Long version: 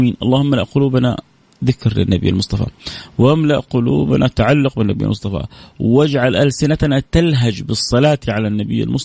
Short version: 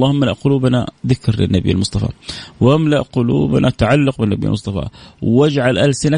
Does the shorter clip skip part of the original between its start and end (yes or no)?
yes